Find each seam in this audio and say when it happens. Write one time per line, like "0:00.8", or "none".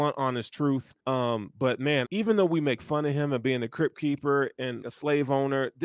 0:01.0
0:02.0
0:04.8